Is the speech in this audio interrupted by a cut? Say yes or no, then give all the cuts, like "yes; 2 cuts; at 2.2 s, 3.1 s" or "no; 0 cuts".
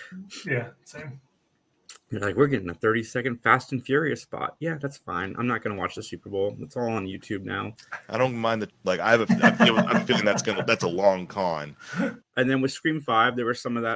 yes; 2 cuts; at 8.7 s, 12.2 s